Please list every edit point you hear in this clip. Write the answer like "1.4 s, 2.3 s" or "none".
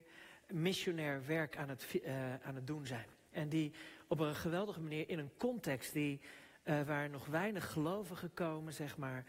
none